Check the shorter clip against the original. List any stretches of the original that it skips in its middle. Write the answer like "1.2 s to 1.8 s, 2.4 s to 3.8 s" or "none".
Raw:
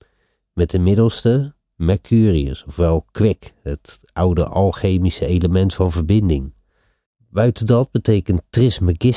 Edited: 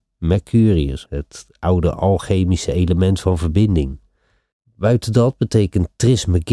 2.6 s to 3.6 s